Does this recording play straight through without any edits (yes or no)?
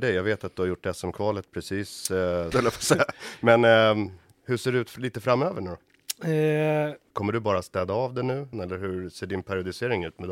no